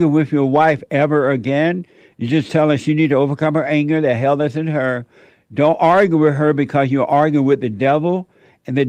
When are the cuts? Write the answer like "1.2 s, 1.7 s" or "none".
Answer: none